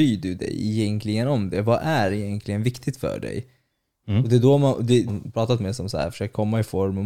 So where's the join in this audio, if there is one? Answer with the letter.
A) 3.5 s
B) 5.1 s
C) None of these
B